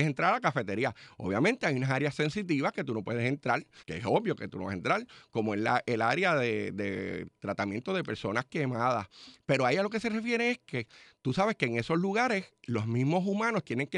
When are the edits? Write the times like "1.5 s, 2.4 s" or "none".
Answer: 3.8 s